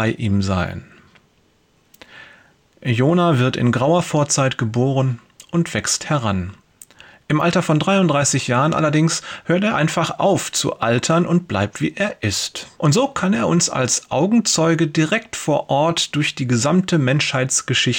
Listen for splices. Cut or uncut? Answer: cut